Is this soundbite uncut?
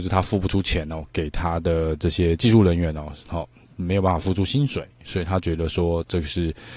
yes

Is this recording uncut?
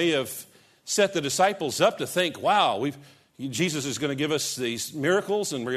yes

